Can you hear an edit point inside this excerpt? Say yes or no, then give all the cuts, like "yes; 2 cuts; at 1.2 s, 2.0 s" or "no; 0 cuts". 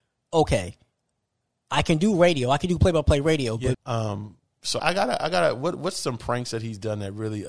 yes; 2 cuts; at 3.7 s, 4.8 s